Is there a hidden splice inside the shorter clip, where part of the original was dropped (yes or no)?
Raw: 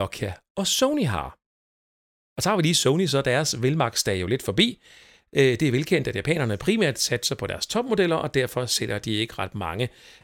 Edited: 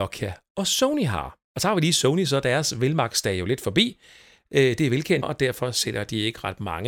yes